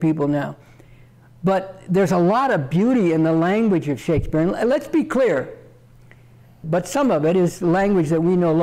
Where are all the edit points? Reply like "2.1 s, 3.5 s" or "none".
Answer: 6.6 s